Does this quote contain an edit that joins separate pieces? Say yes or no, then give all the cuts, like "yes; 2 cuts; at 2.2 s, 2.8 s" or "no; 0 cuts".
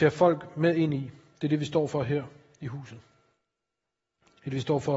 no; 0 cuts